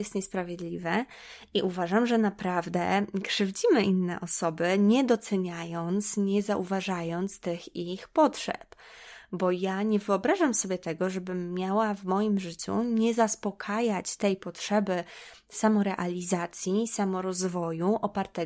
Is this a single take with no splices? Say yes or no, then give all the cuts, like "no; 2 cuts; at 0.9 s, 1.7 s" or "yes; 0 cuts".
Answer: yes; 0 cuts